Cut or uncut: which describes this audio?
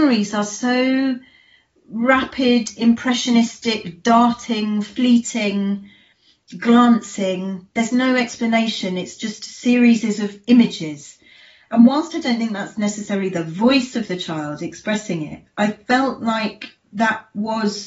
uncut